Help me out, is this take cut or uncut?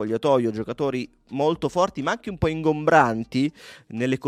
uncut